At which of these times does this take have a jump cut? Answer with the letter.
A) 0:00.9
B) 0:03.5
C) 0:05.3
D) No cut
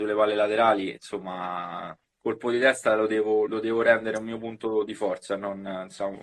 B